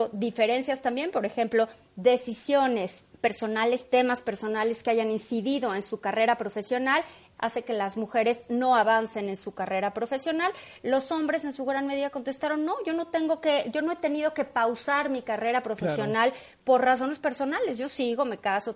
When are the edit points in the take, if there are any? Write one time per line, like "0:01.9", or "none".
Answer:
0:03.1
0:07.4